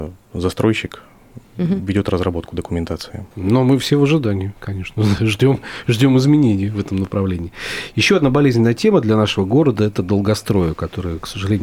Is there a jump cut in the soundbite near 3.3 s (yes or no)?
yes